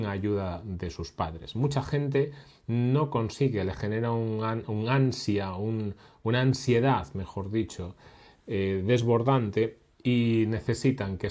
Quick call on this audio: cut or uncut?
uncut